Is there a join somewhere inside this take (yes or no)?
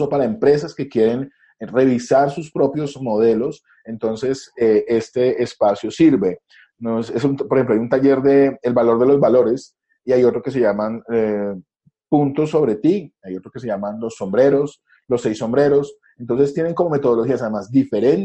no